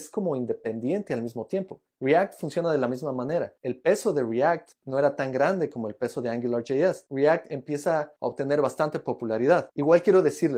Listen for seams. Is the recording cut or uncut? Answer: cut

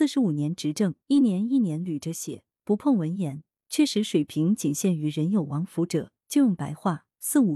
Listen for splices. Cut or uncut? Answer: cut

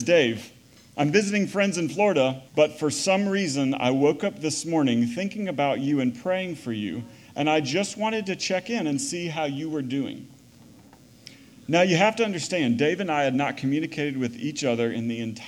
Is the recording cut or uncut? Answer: cut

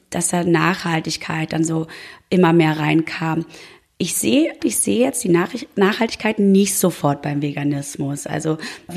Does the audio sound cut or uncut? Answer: cut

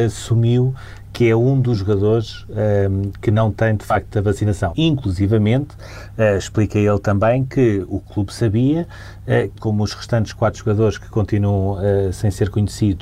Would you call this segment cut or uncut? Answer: cut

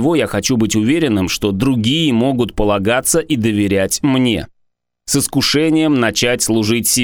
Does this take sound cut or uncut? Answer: cut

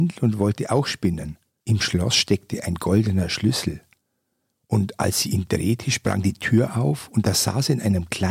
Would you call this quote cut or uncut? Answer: cut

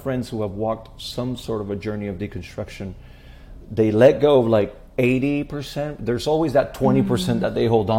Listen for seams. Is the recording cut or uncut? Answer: uncut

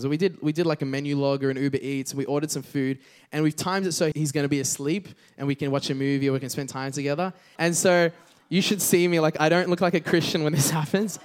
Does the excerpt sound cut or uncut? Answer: cut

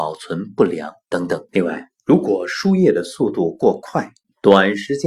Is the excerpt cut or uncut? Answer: cut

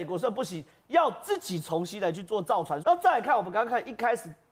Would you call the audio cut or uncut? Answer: cut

